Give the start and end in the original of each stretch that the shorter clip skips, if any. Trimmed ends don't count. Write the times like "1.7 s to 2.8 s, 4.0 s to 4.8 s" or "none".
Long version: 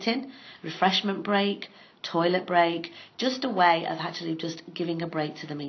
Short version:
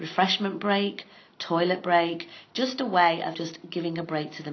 4.0 s to 4.4 s